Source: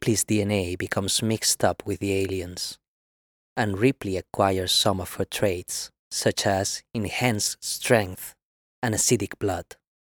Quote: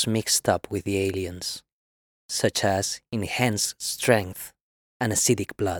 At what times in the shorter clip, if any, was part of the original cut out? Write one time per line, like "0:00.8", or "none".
0:02.2

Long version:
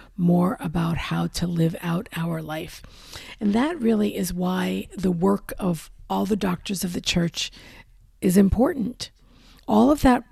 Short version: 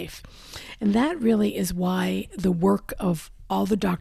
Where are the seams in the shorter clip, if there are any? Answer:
none

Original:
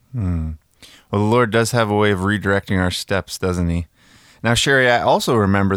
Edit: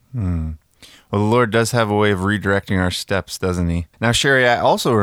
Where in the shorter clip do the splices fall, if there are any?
0:03.9

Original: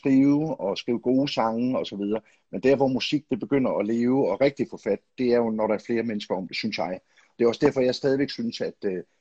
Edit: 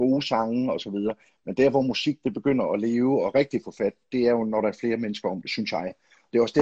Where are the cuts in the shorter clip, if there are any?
none

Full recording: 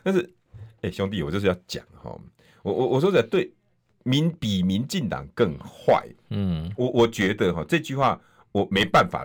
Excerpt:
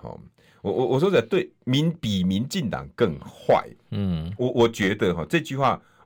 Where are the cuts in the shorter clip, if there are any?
0:01.6

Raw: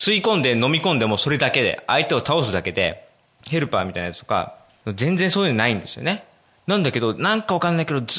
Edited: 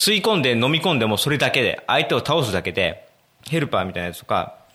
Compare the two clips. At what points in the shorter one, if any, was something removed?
none

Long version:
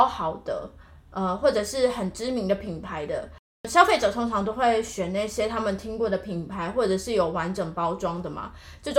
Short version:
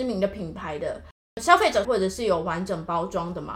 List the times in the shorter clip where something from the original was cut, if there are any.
0:01.8

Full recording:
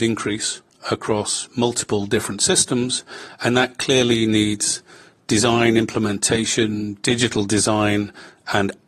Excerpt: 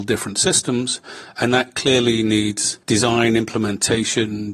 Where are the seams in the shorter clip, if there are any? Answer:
0:02.8

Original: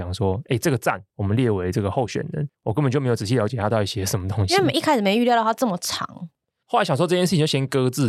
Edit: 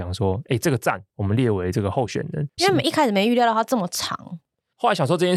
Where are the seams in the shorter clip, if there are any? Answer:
0:02.6

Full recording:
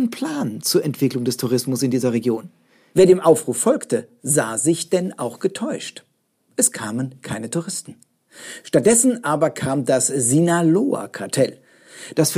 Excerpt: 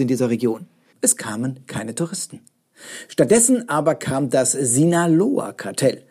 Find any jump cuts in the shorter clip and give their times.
0:00.9

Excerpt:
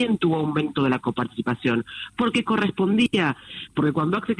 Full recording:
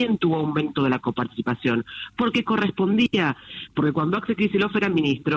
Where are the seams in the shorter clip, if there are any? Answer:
none

